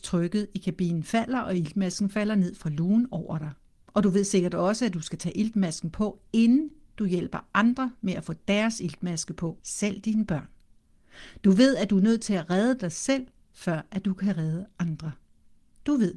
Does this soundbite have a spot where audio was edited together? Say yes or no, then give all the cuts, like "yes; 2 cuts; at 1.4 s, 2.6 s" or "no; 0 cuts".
yes; 1 cut; at 9.6 s